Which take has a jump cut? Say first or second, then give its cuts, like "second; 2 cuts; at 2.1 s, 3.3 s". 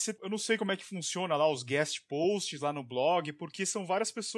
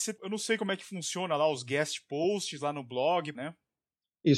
second; 1 cut; at 3.3 s